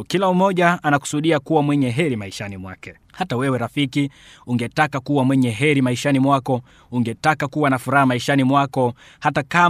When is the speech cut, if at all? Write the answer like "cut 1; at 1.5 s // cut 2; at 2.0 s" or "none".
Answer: cut 1; at 3.0 s